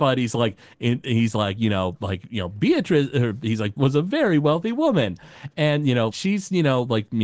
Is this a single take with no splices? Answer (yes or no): no